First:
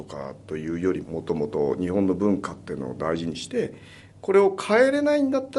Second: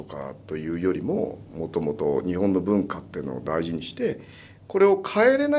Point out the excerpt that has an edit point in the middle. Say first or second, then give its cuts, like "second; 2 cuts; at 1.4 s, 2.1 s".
first; 1 cut; at 1.0 s